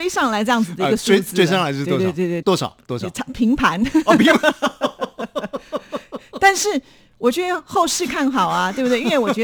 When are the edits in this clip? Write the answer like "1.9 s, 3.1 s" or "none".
2.4 s